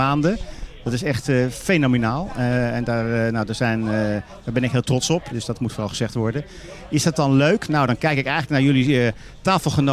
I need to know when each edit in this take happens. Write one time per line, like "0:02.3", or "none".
0:05.3